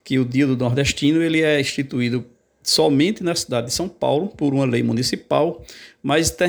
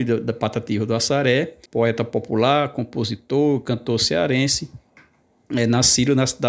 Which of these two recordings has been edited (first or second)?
second